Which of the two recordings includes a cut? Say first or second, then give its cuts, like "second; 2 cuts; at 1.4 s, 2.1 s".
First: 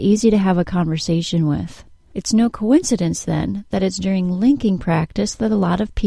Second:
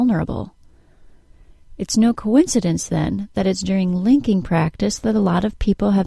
first; 1 cut; at 2.1 s